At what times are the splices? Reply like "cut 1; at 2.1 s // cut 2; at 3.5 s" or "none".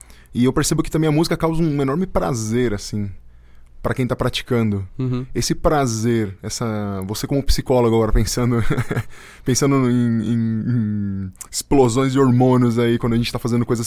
none